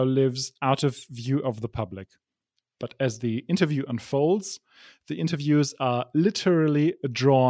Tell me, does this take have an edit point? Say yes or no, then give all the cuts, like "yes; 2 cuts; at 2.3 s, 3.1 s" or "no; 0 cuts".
no; 0 cuts